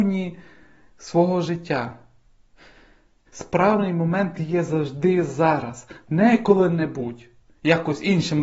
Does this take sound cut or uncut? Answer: cut